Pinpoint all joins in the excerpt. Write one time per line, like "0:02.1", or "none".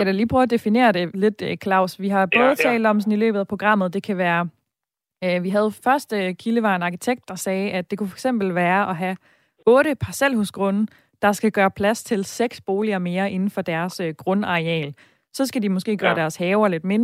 none